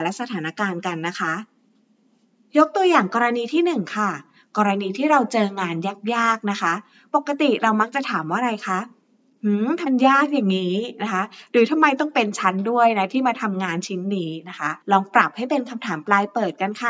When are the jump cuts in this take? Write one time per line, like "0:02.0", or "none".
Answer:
0:09.9
0:14.8